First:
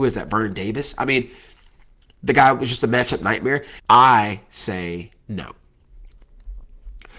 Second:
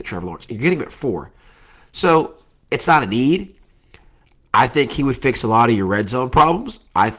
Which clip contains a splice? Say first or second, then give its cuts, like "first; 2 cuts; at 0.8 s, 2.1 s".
first; 1 cut; at 3.8 s